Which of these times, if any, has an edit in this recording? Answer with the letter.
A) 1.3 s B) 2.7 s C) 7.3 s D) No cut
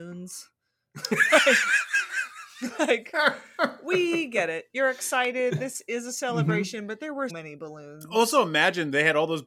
C